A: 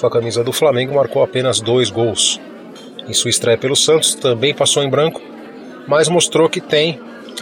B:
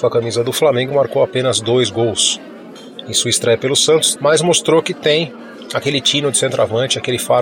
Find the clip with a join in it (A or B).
B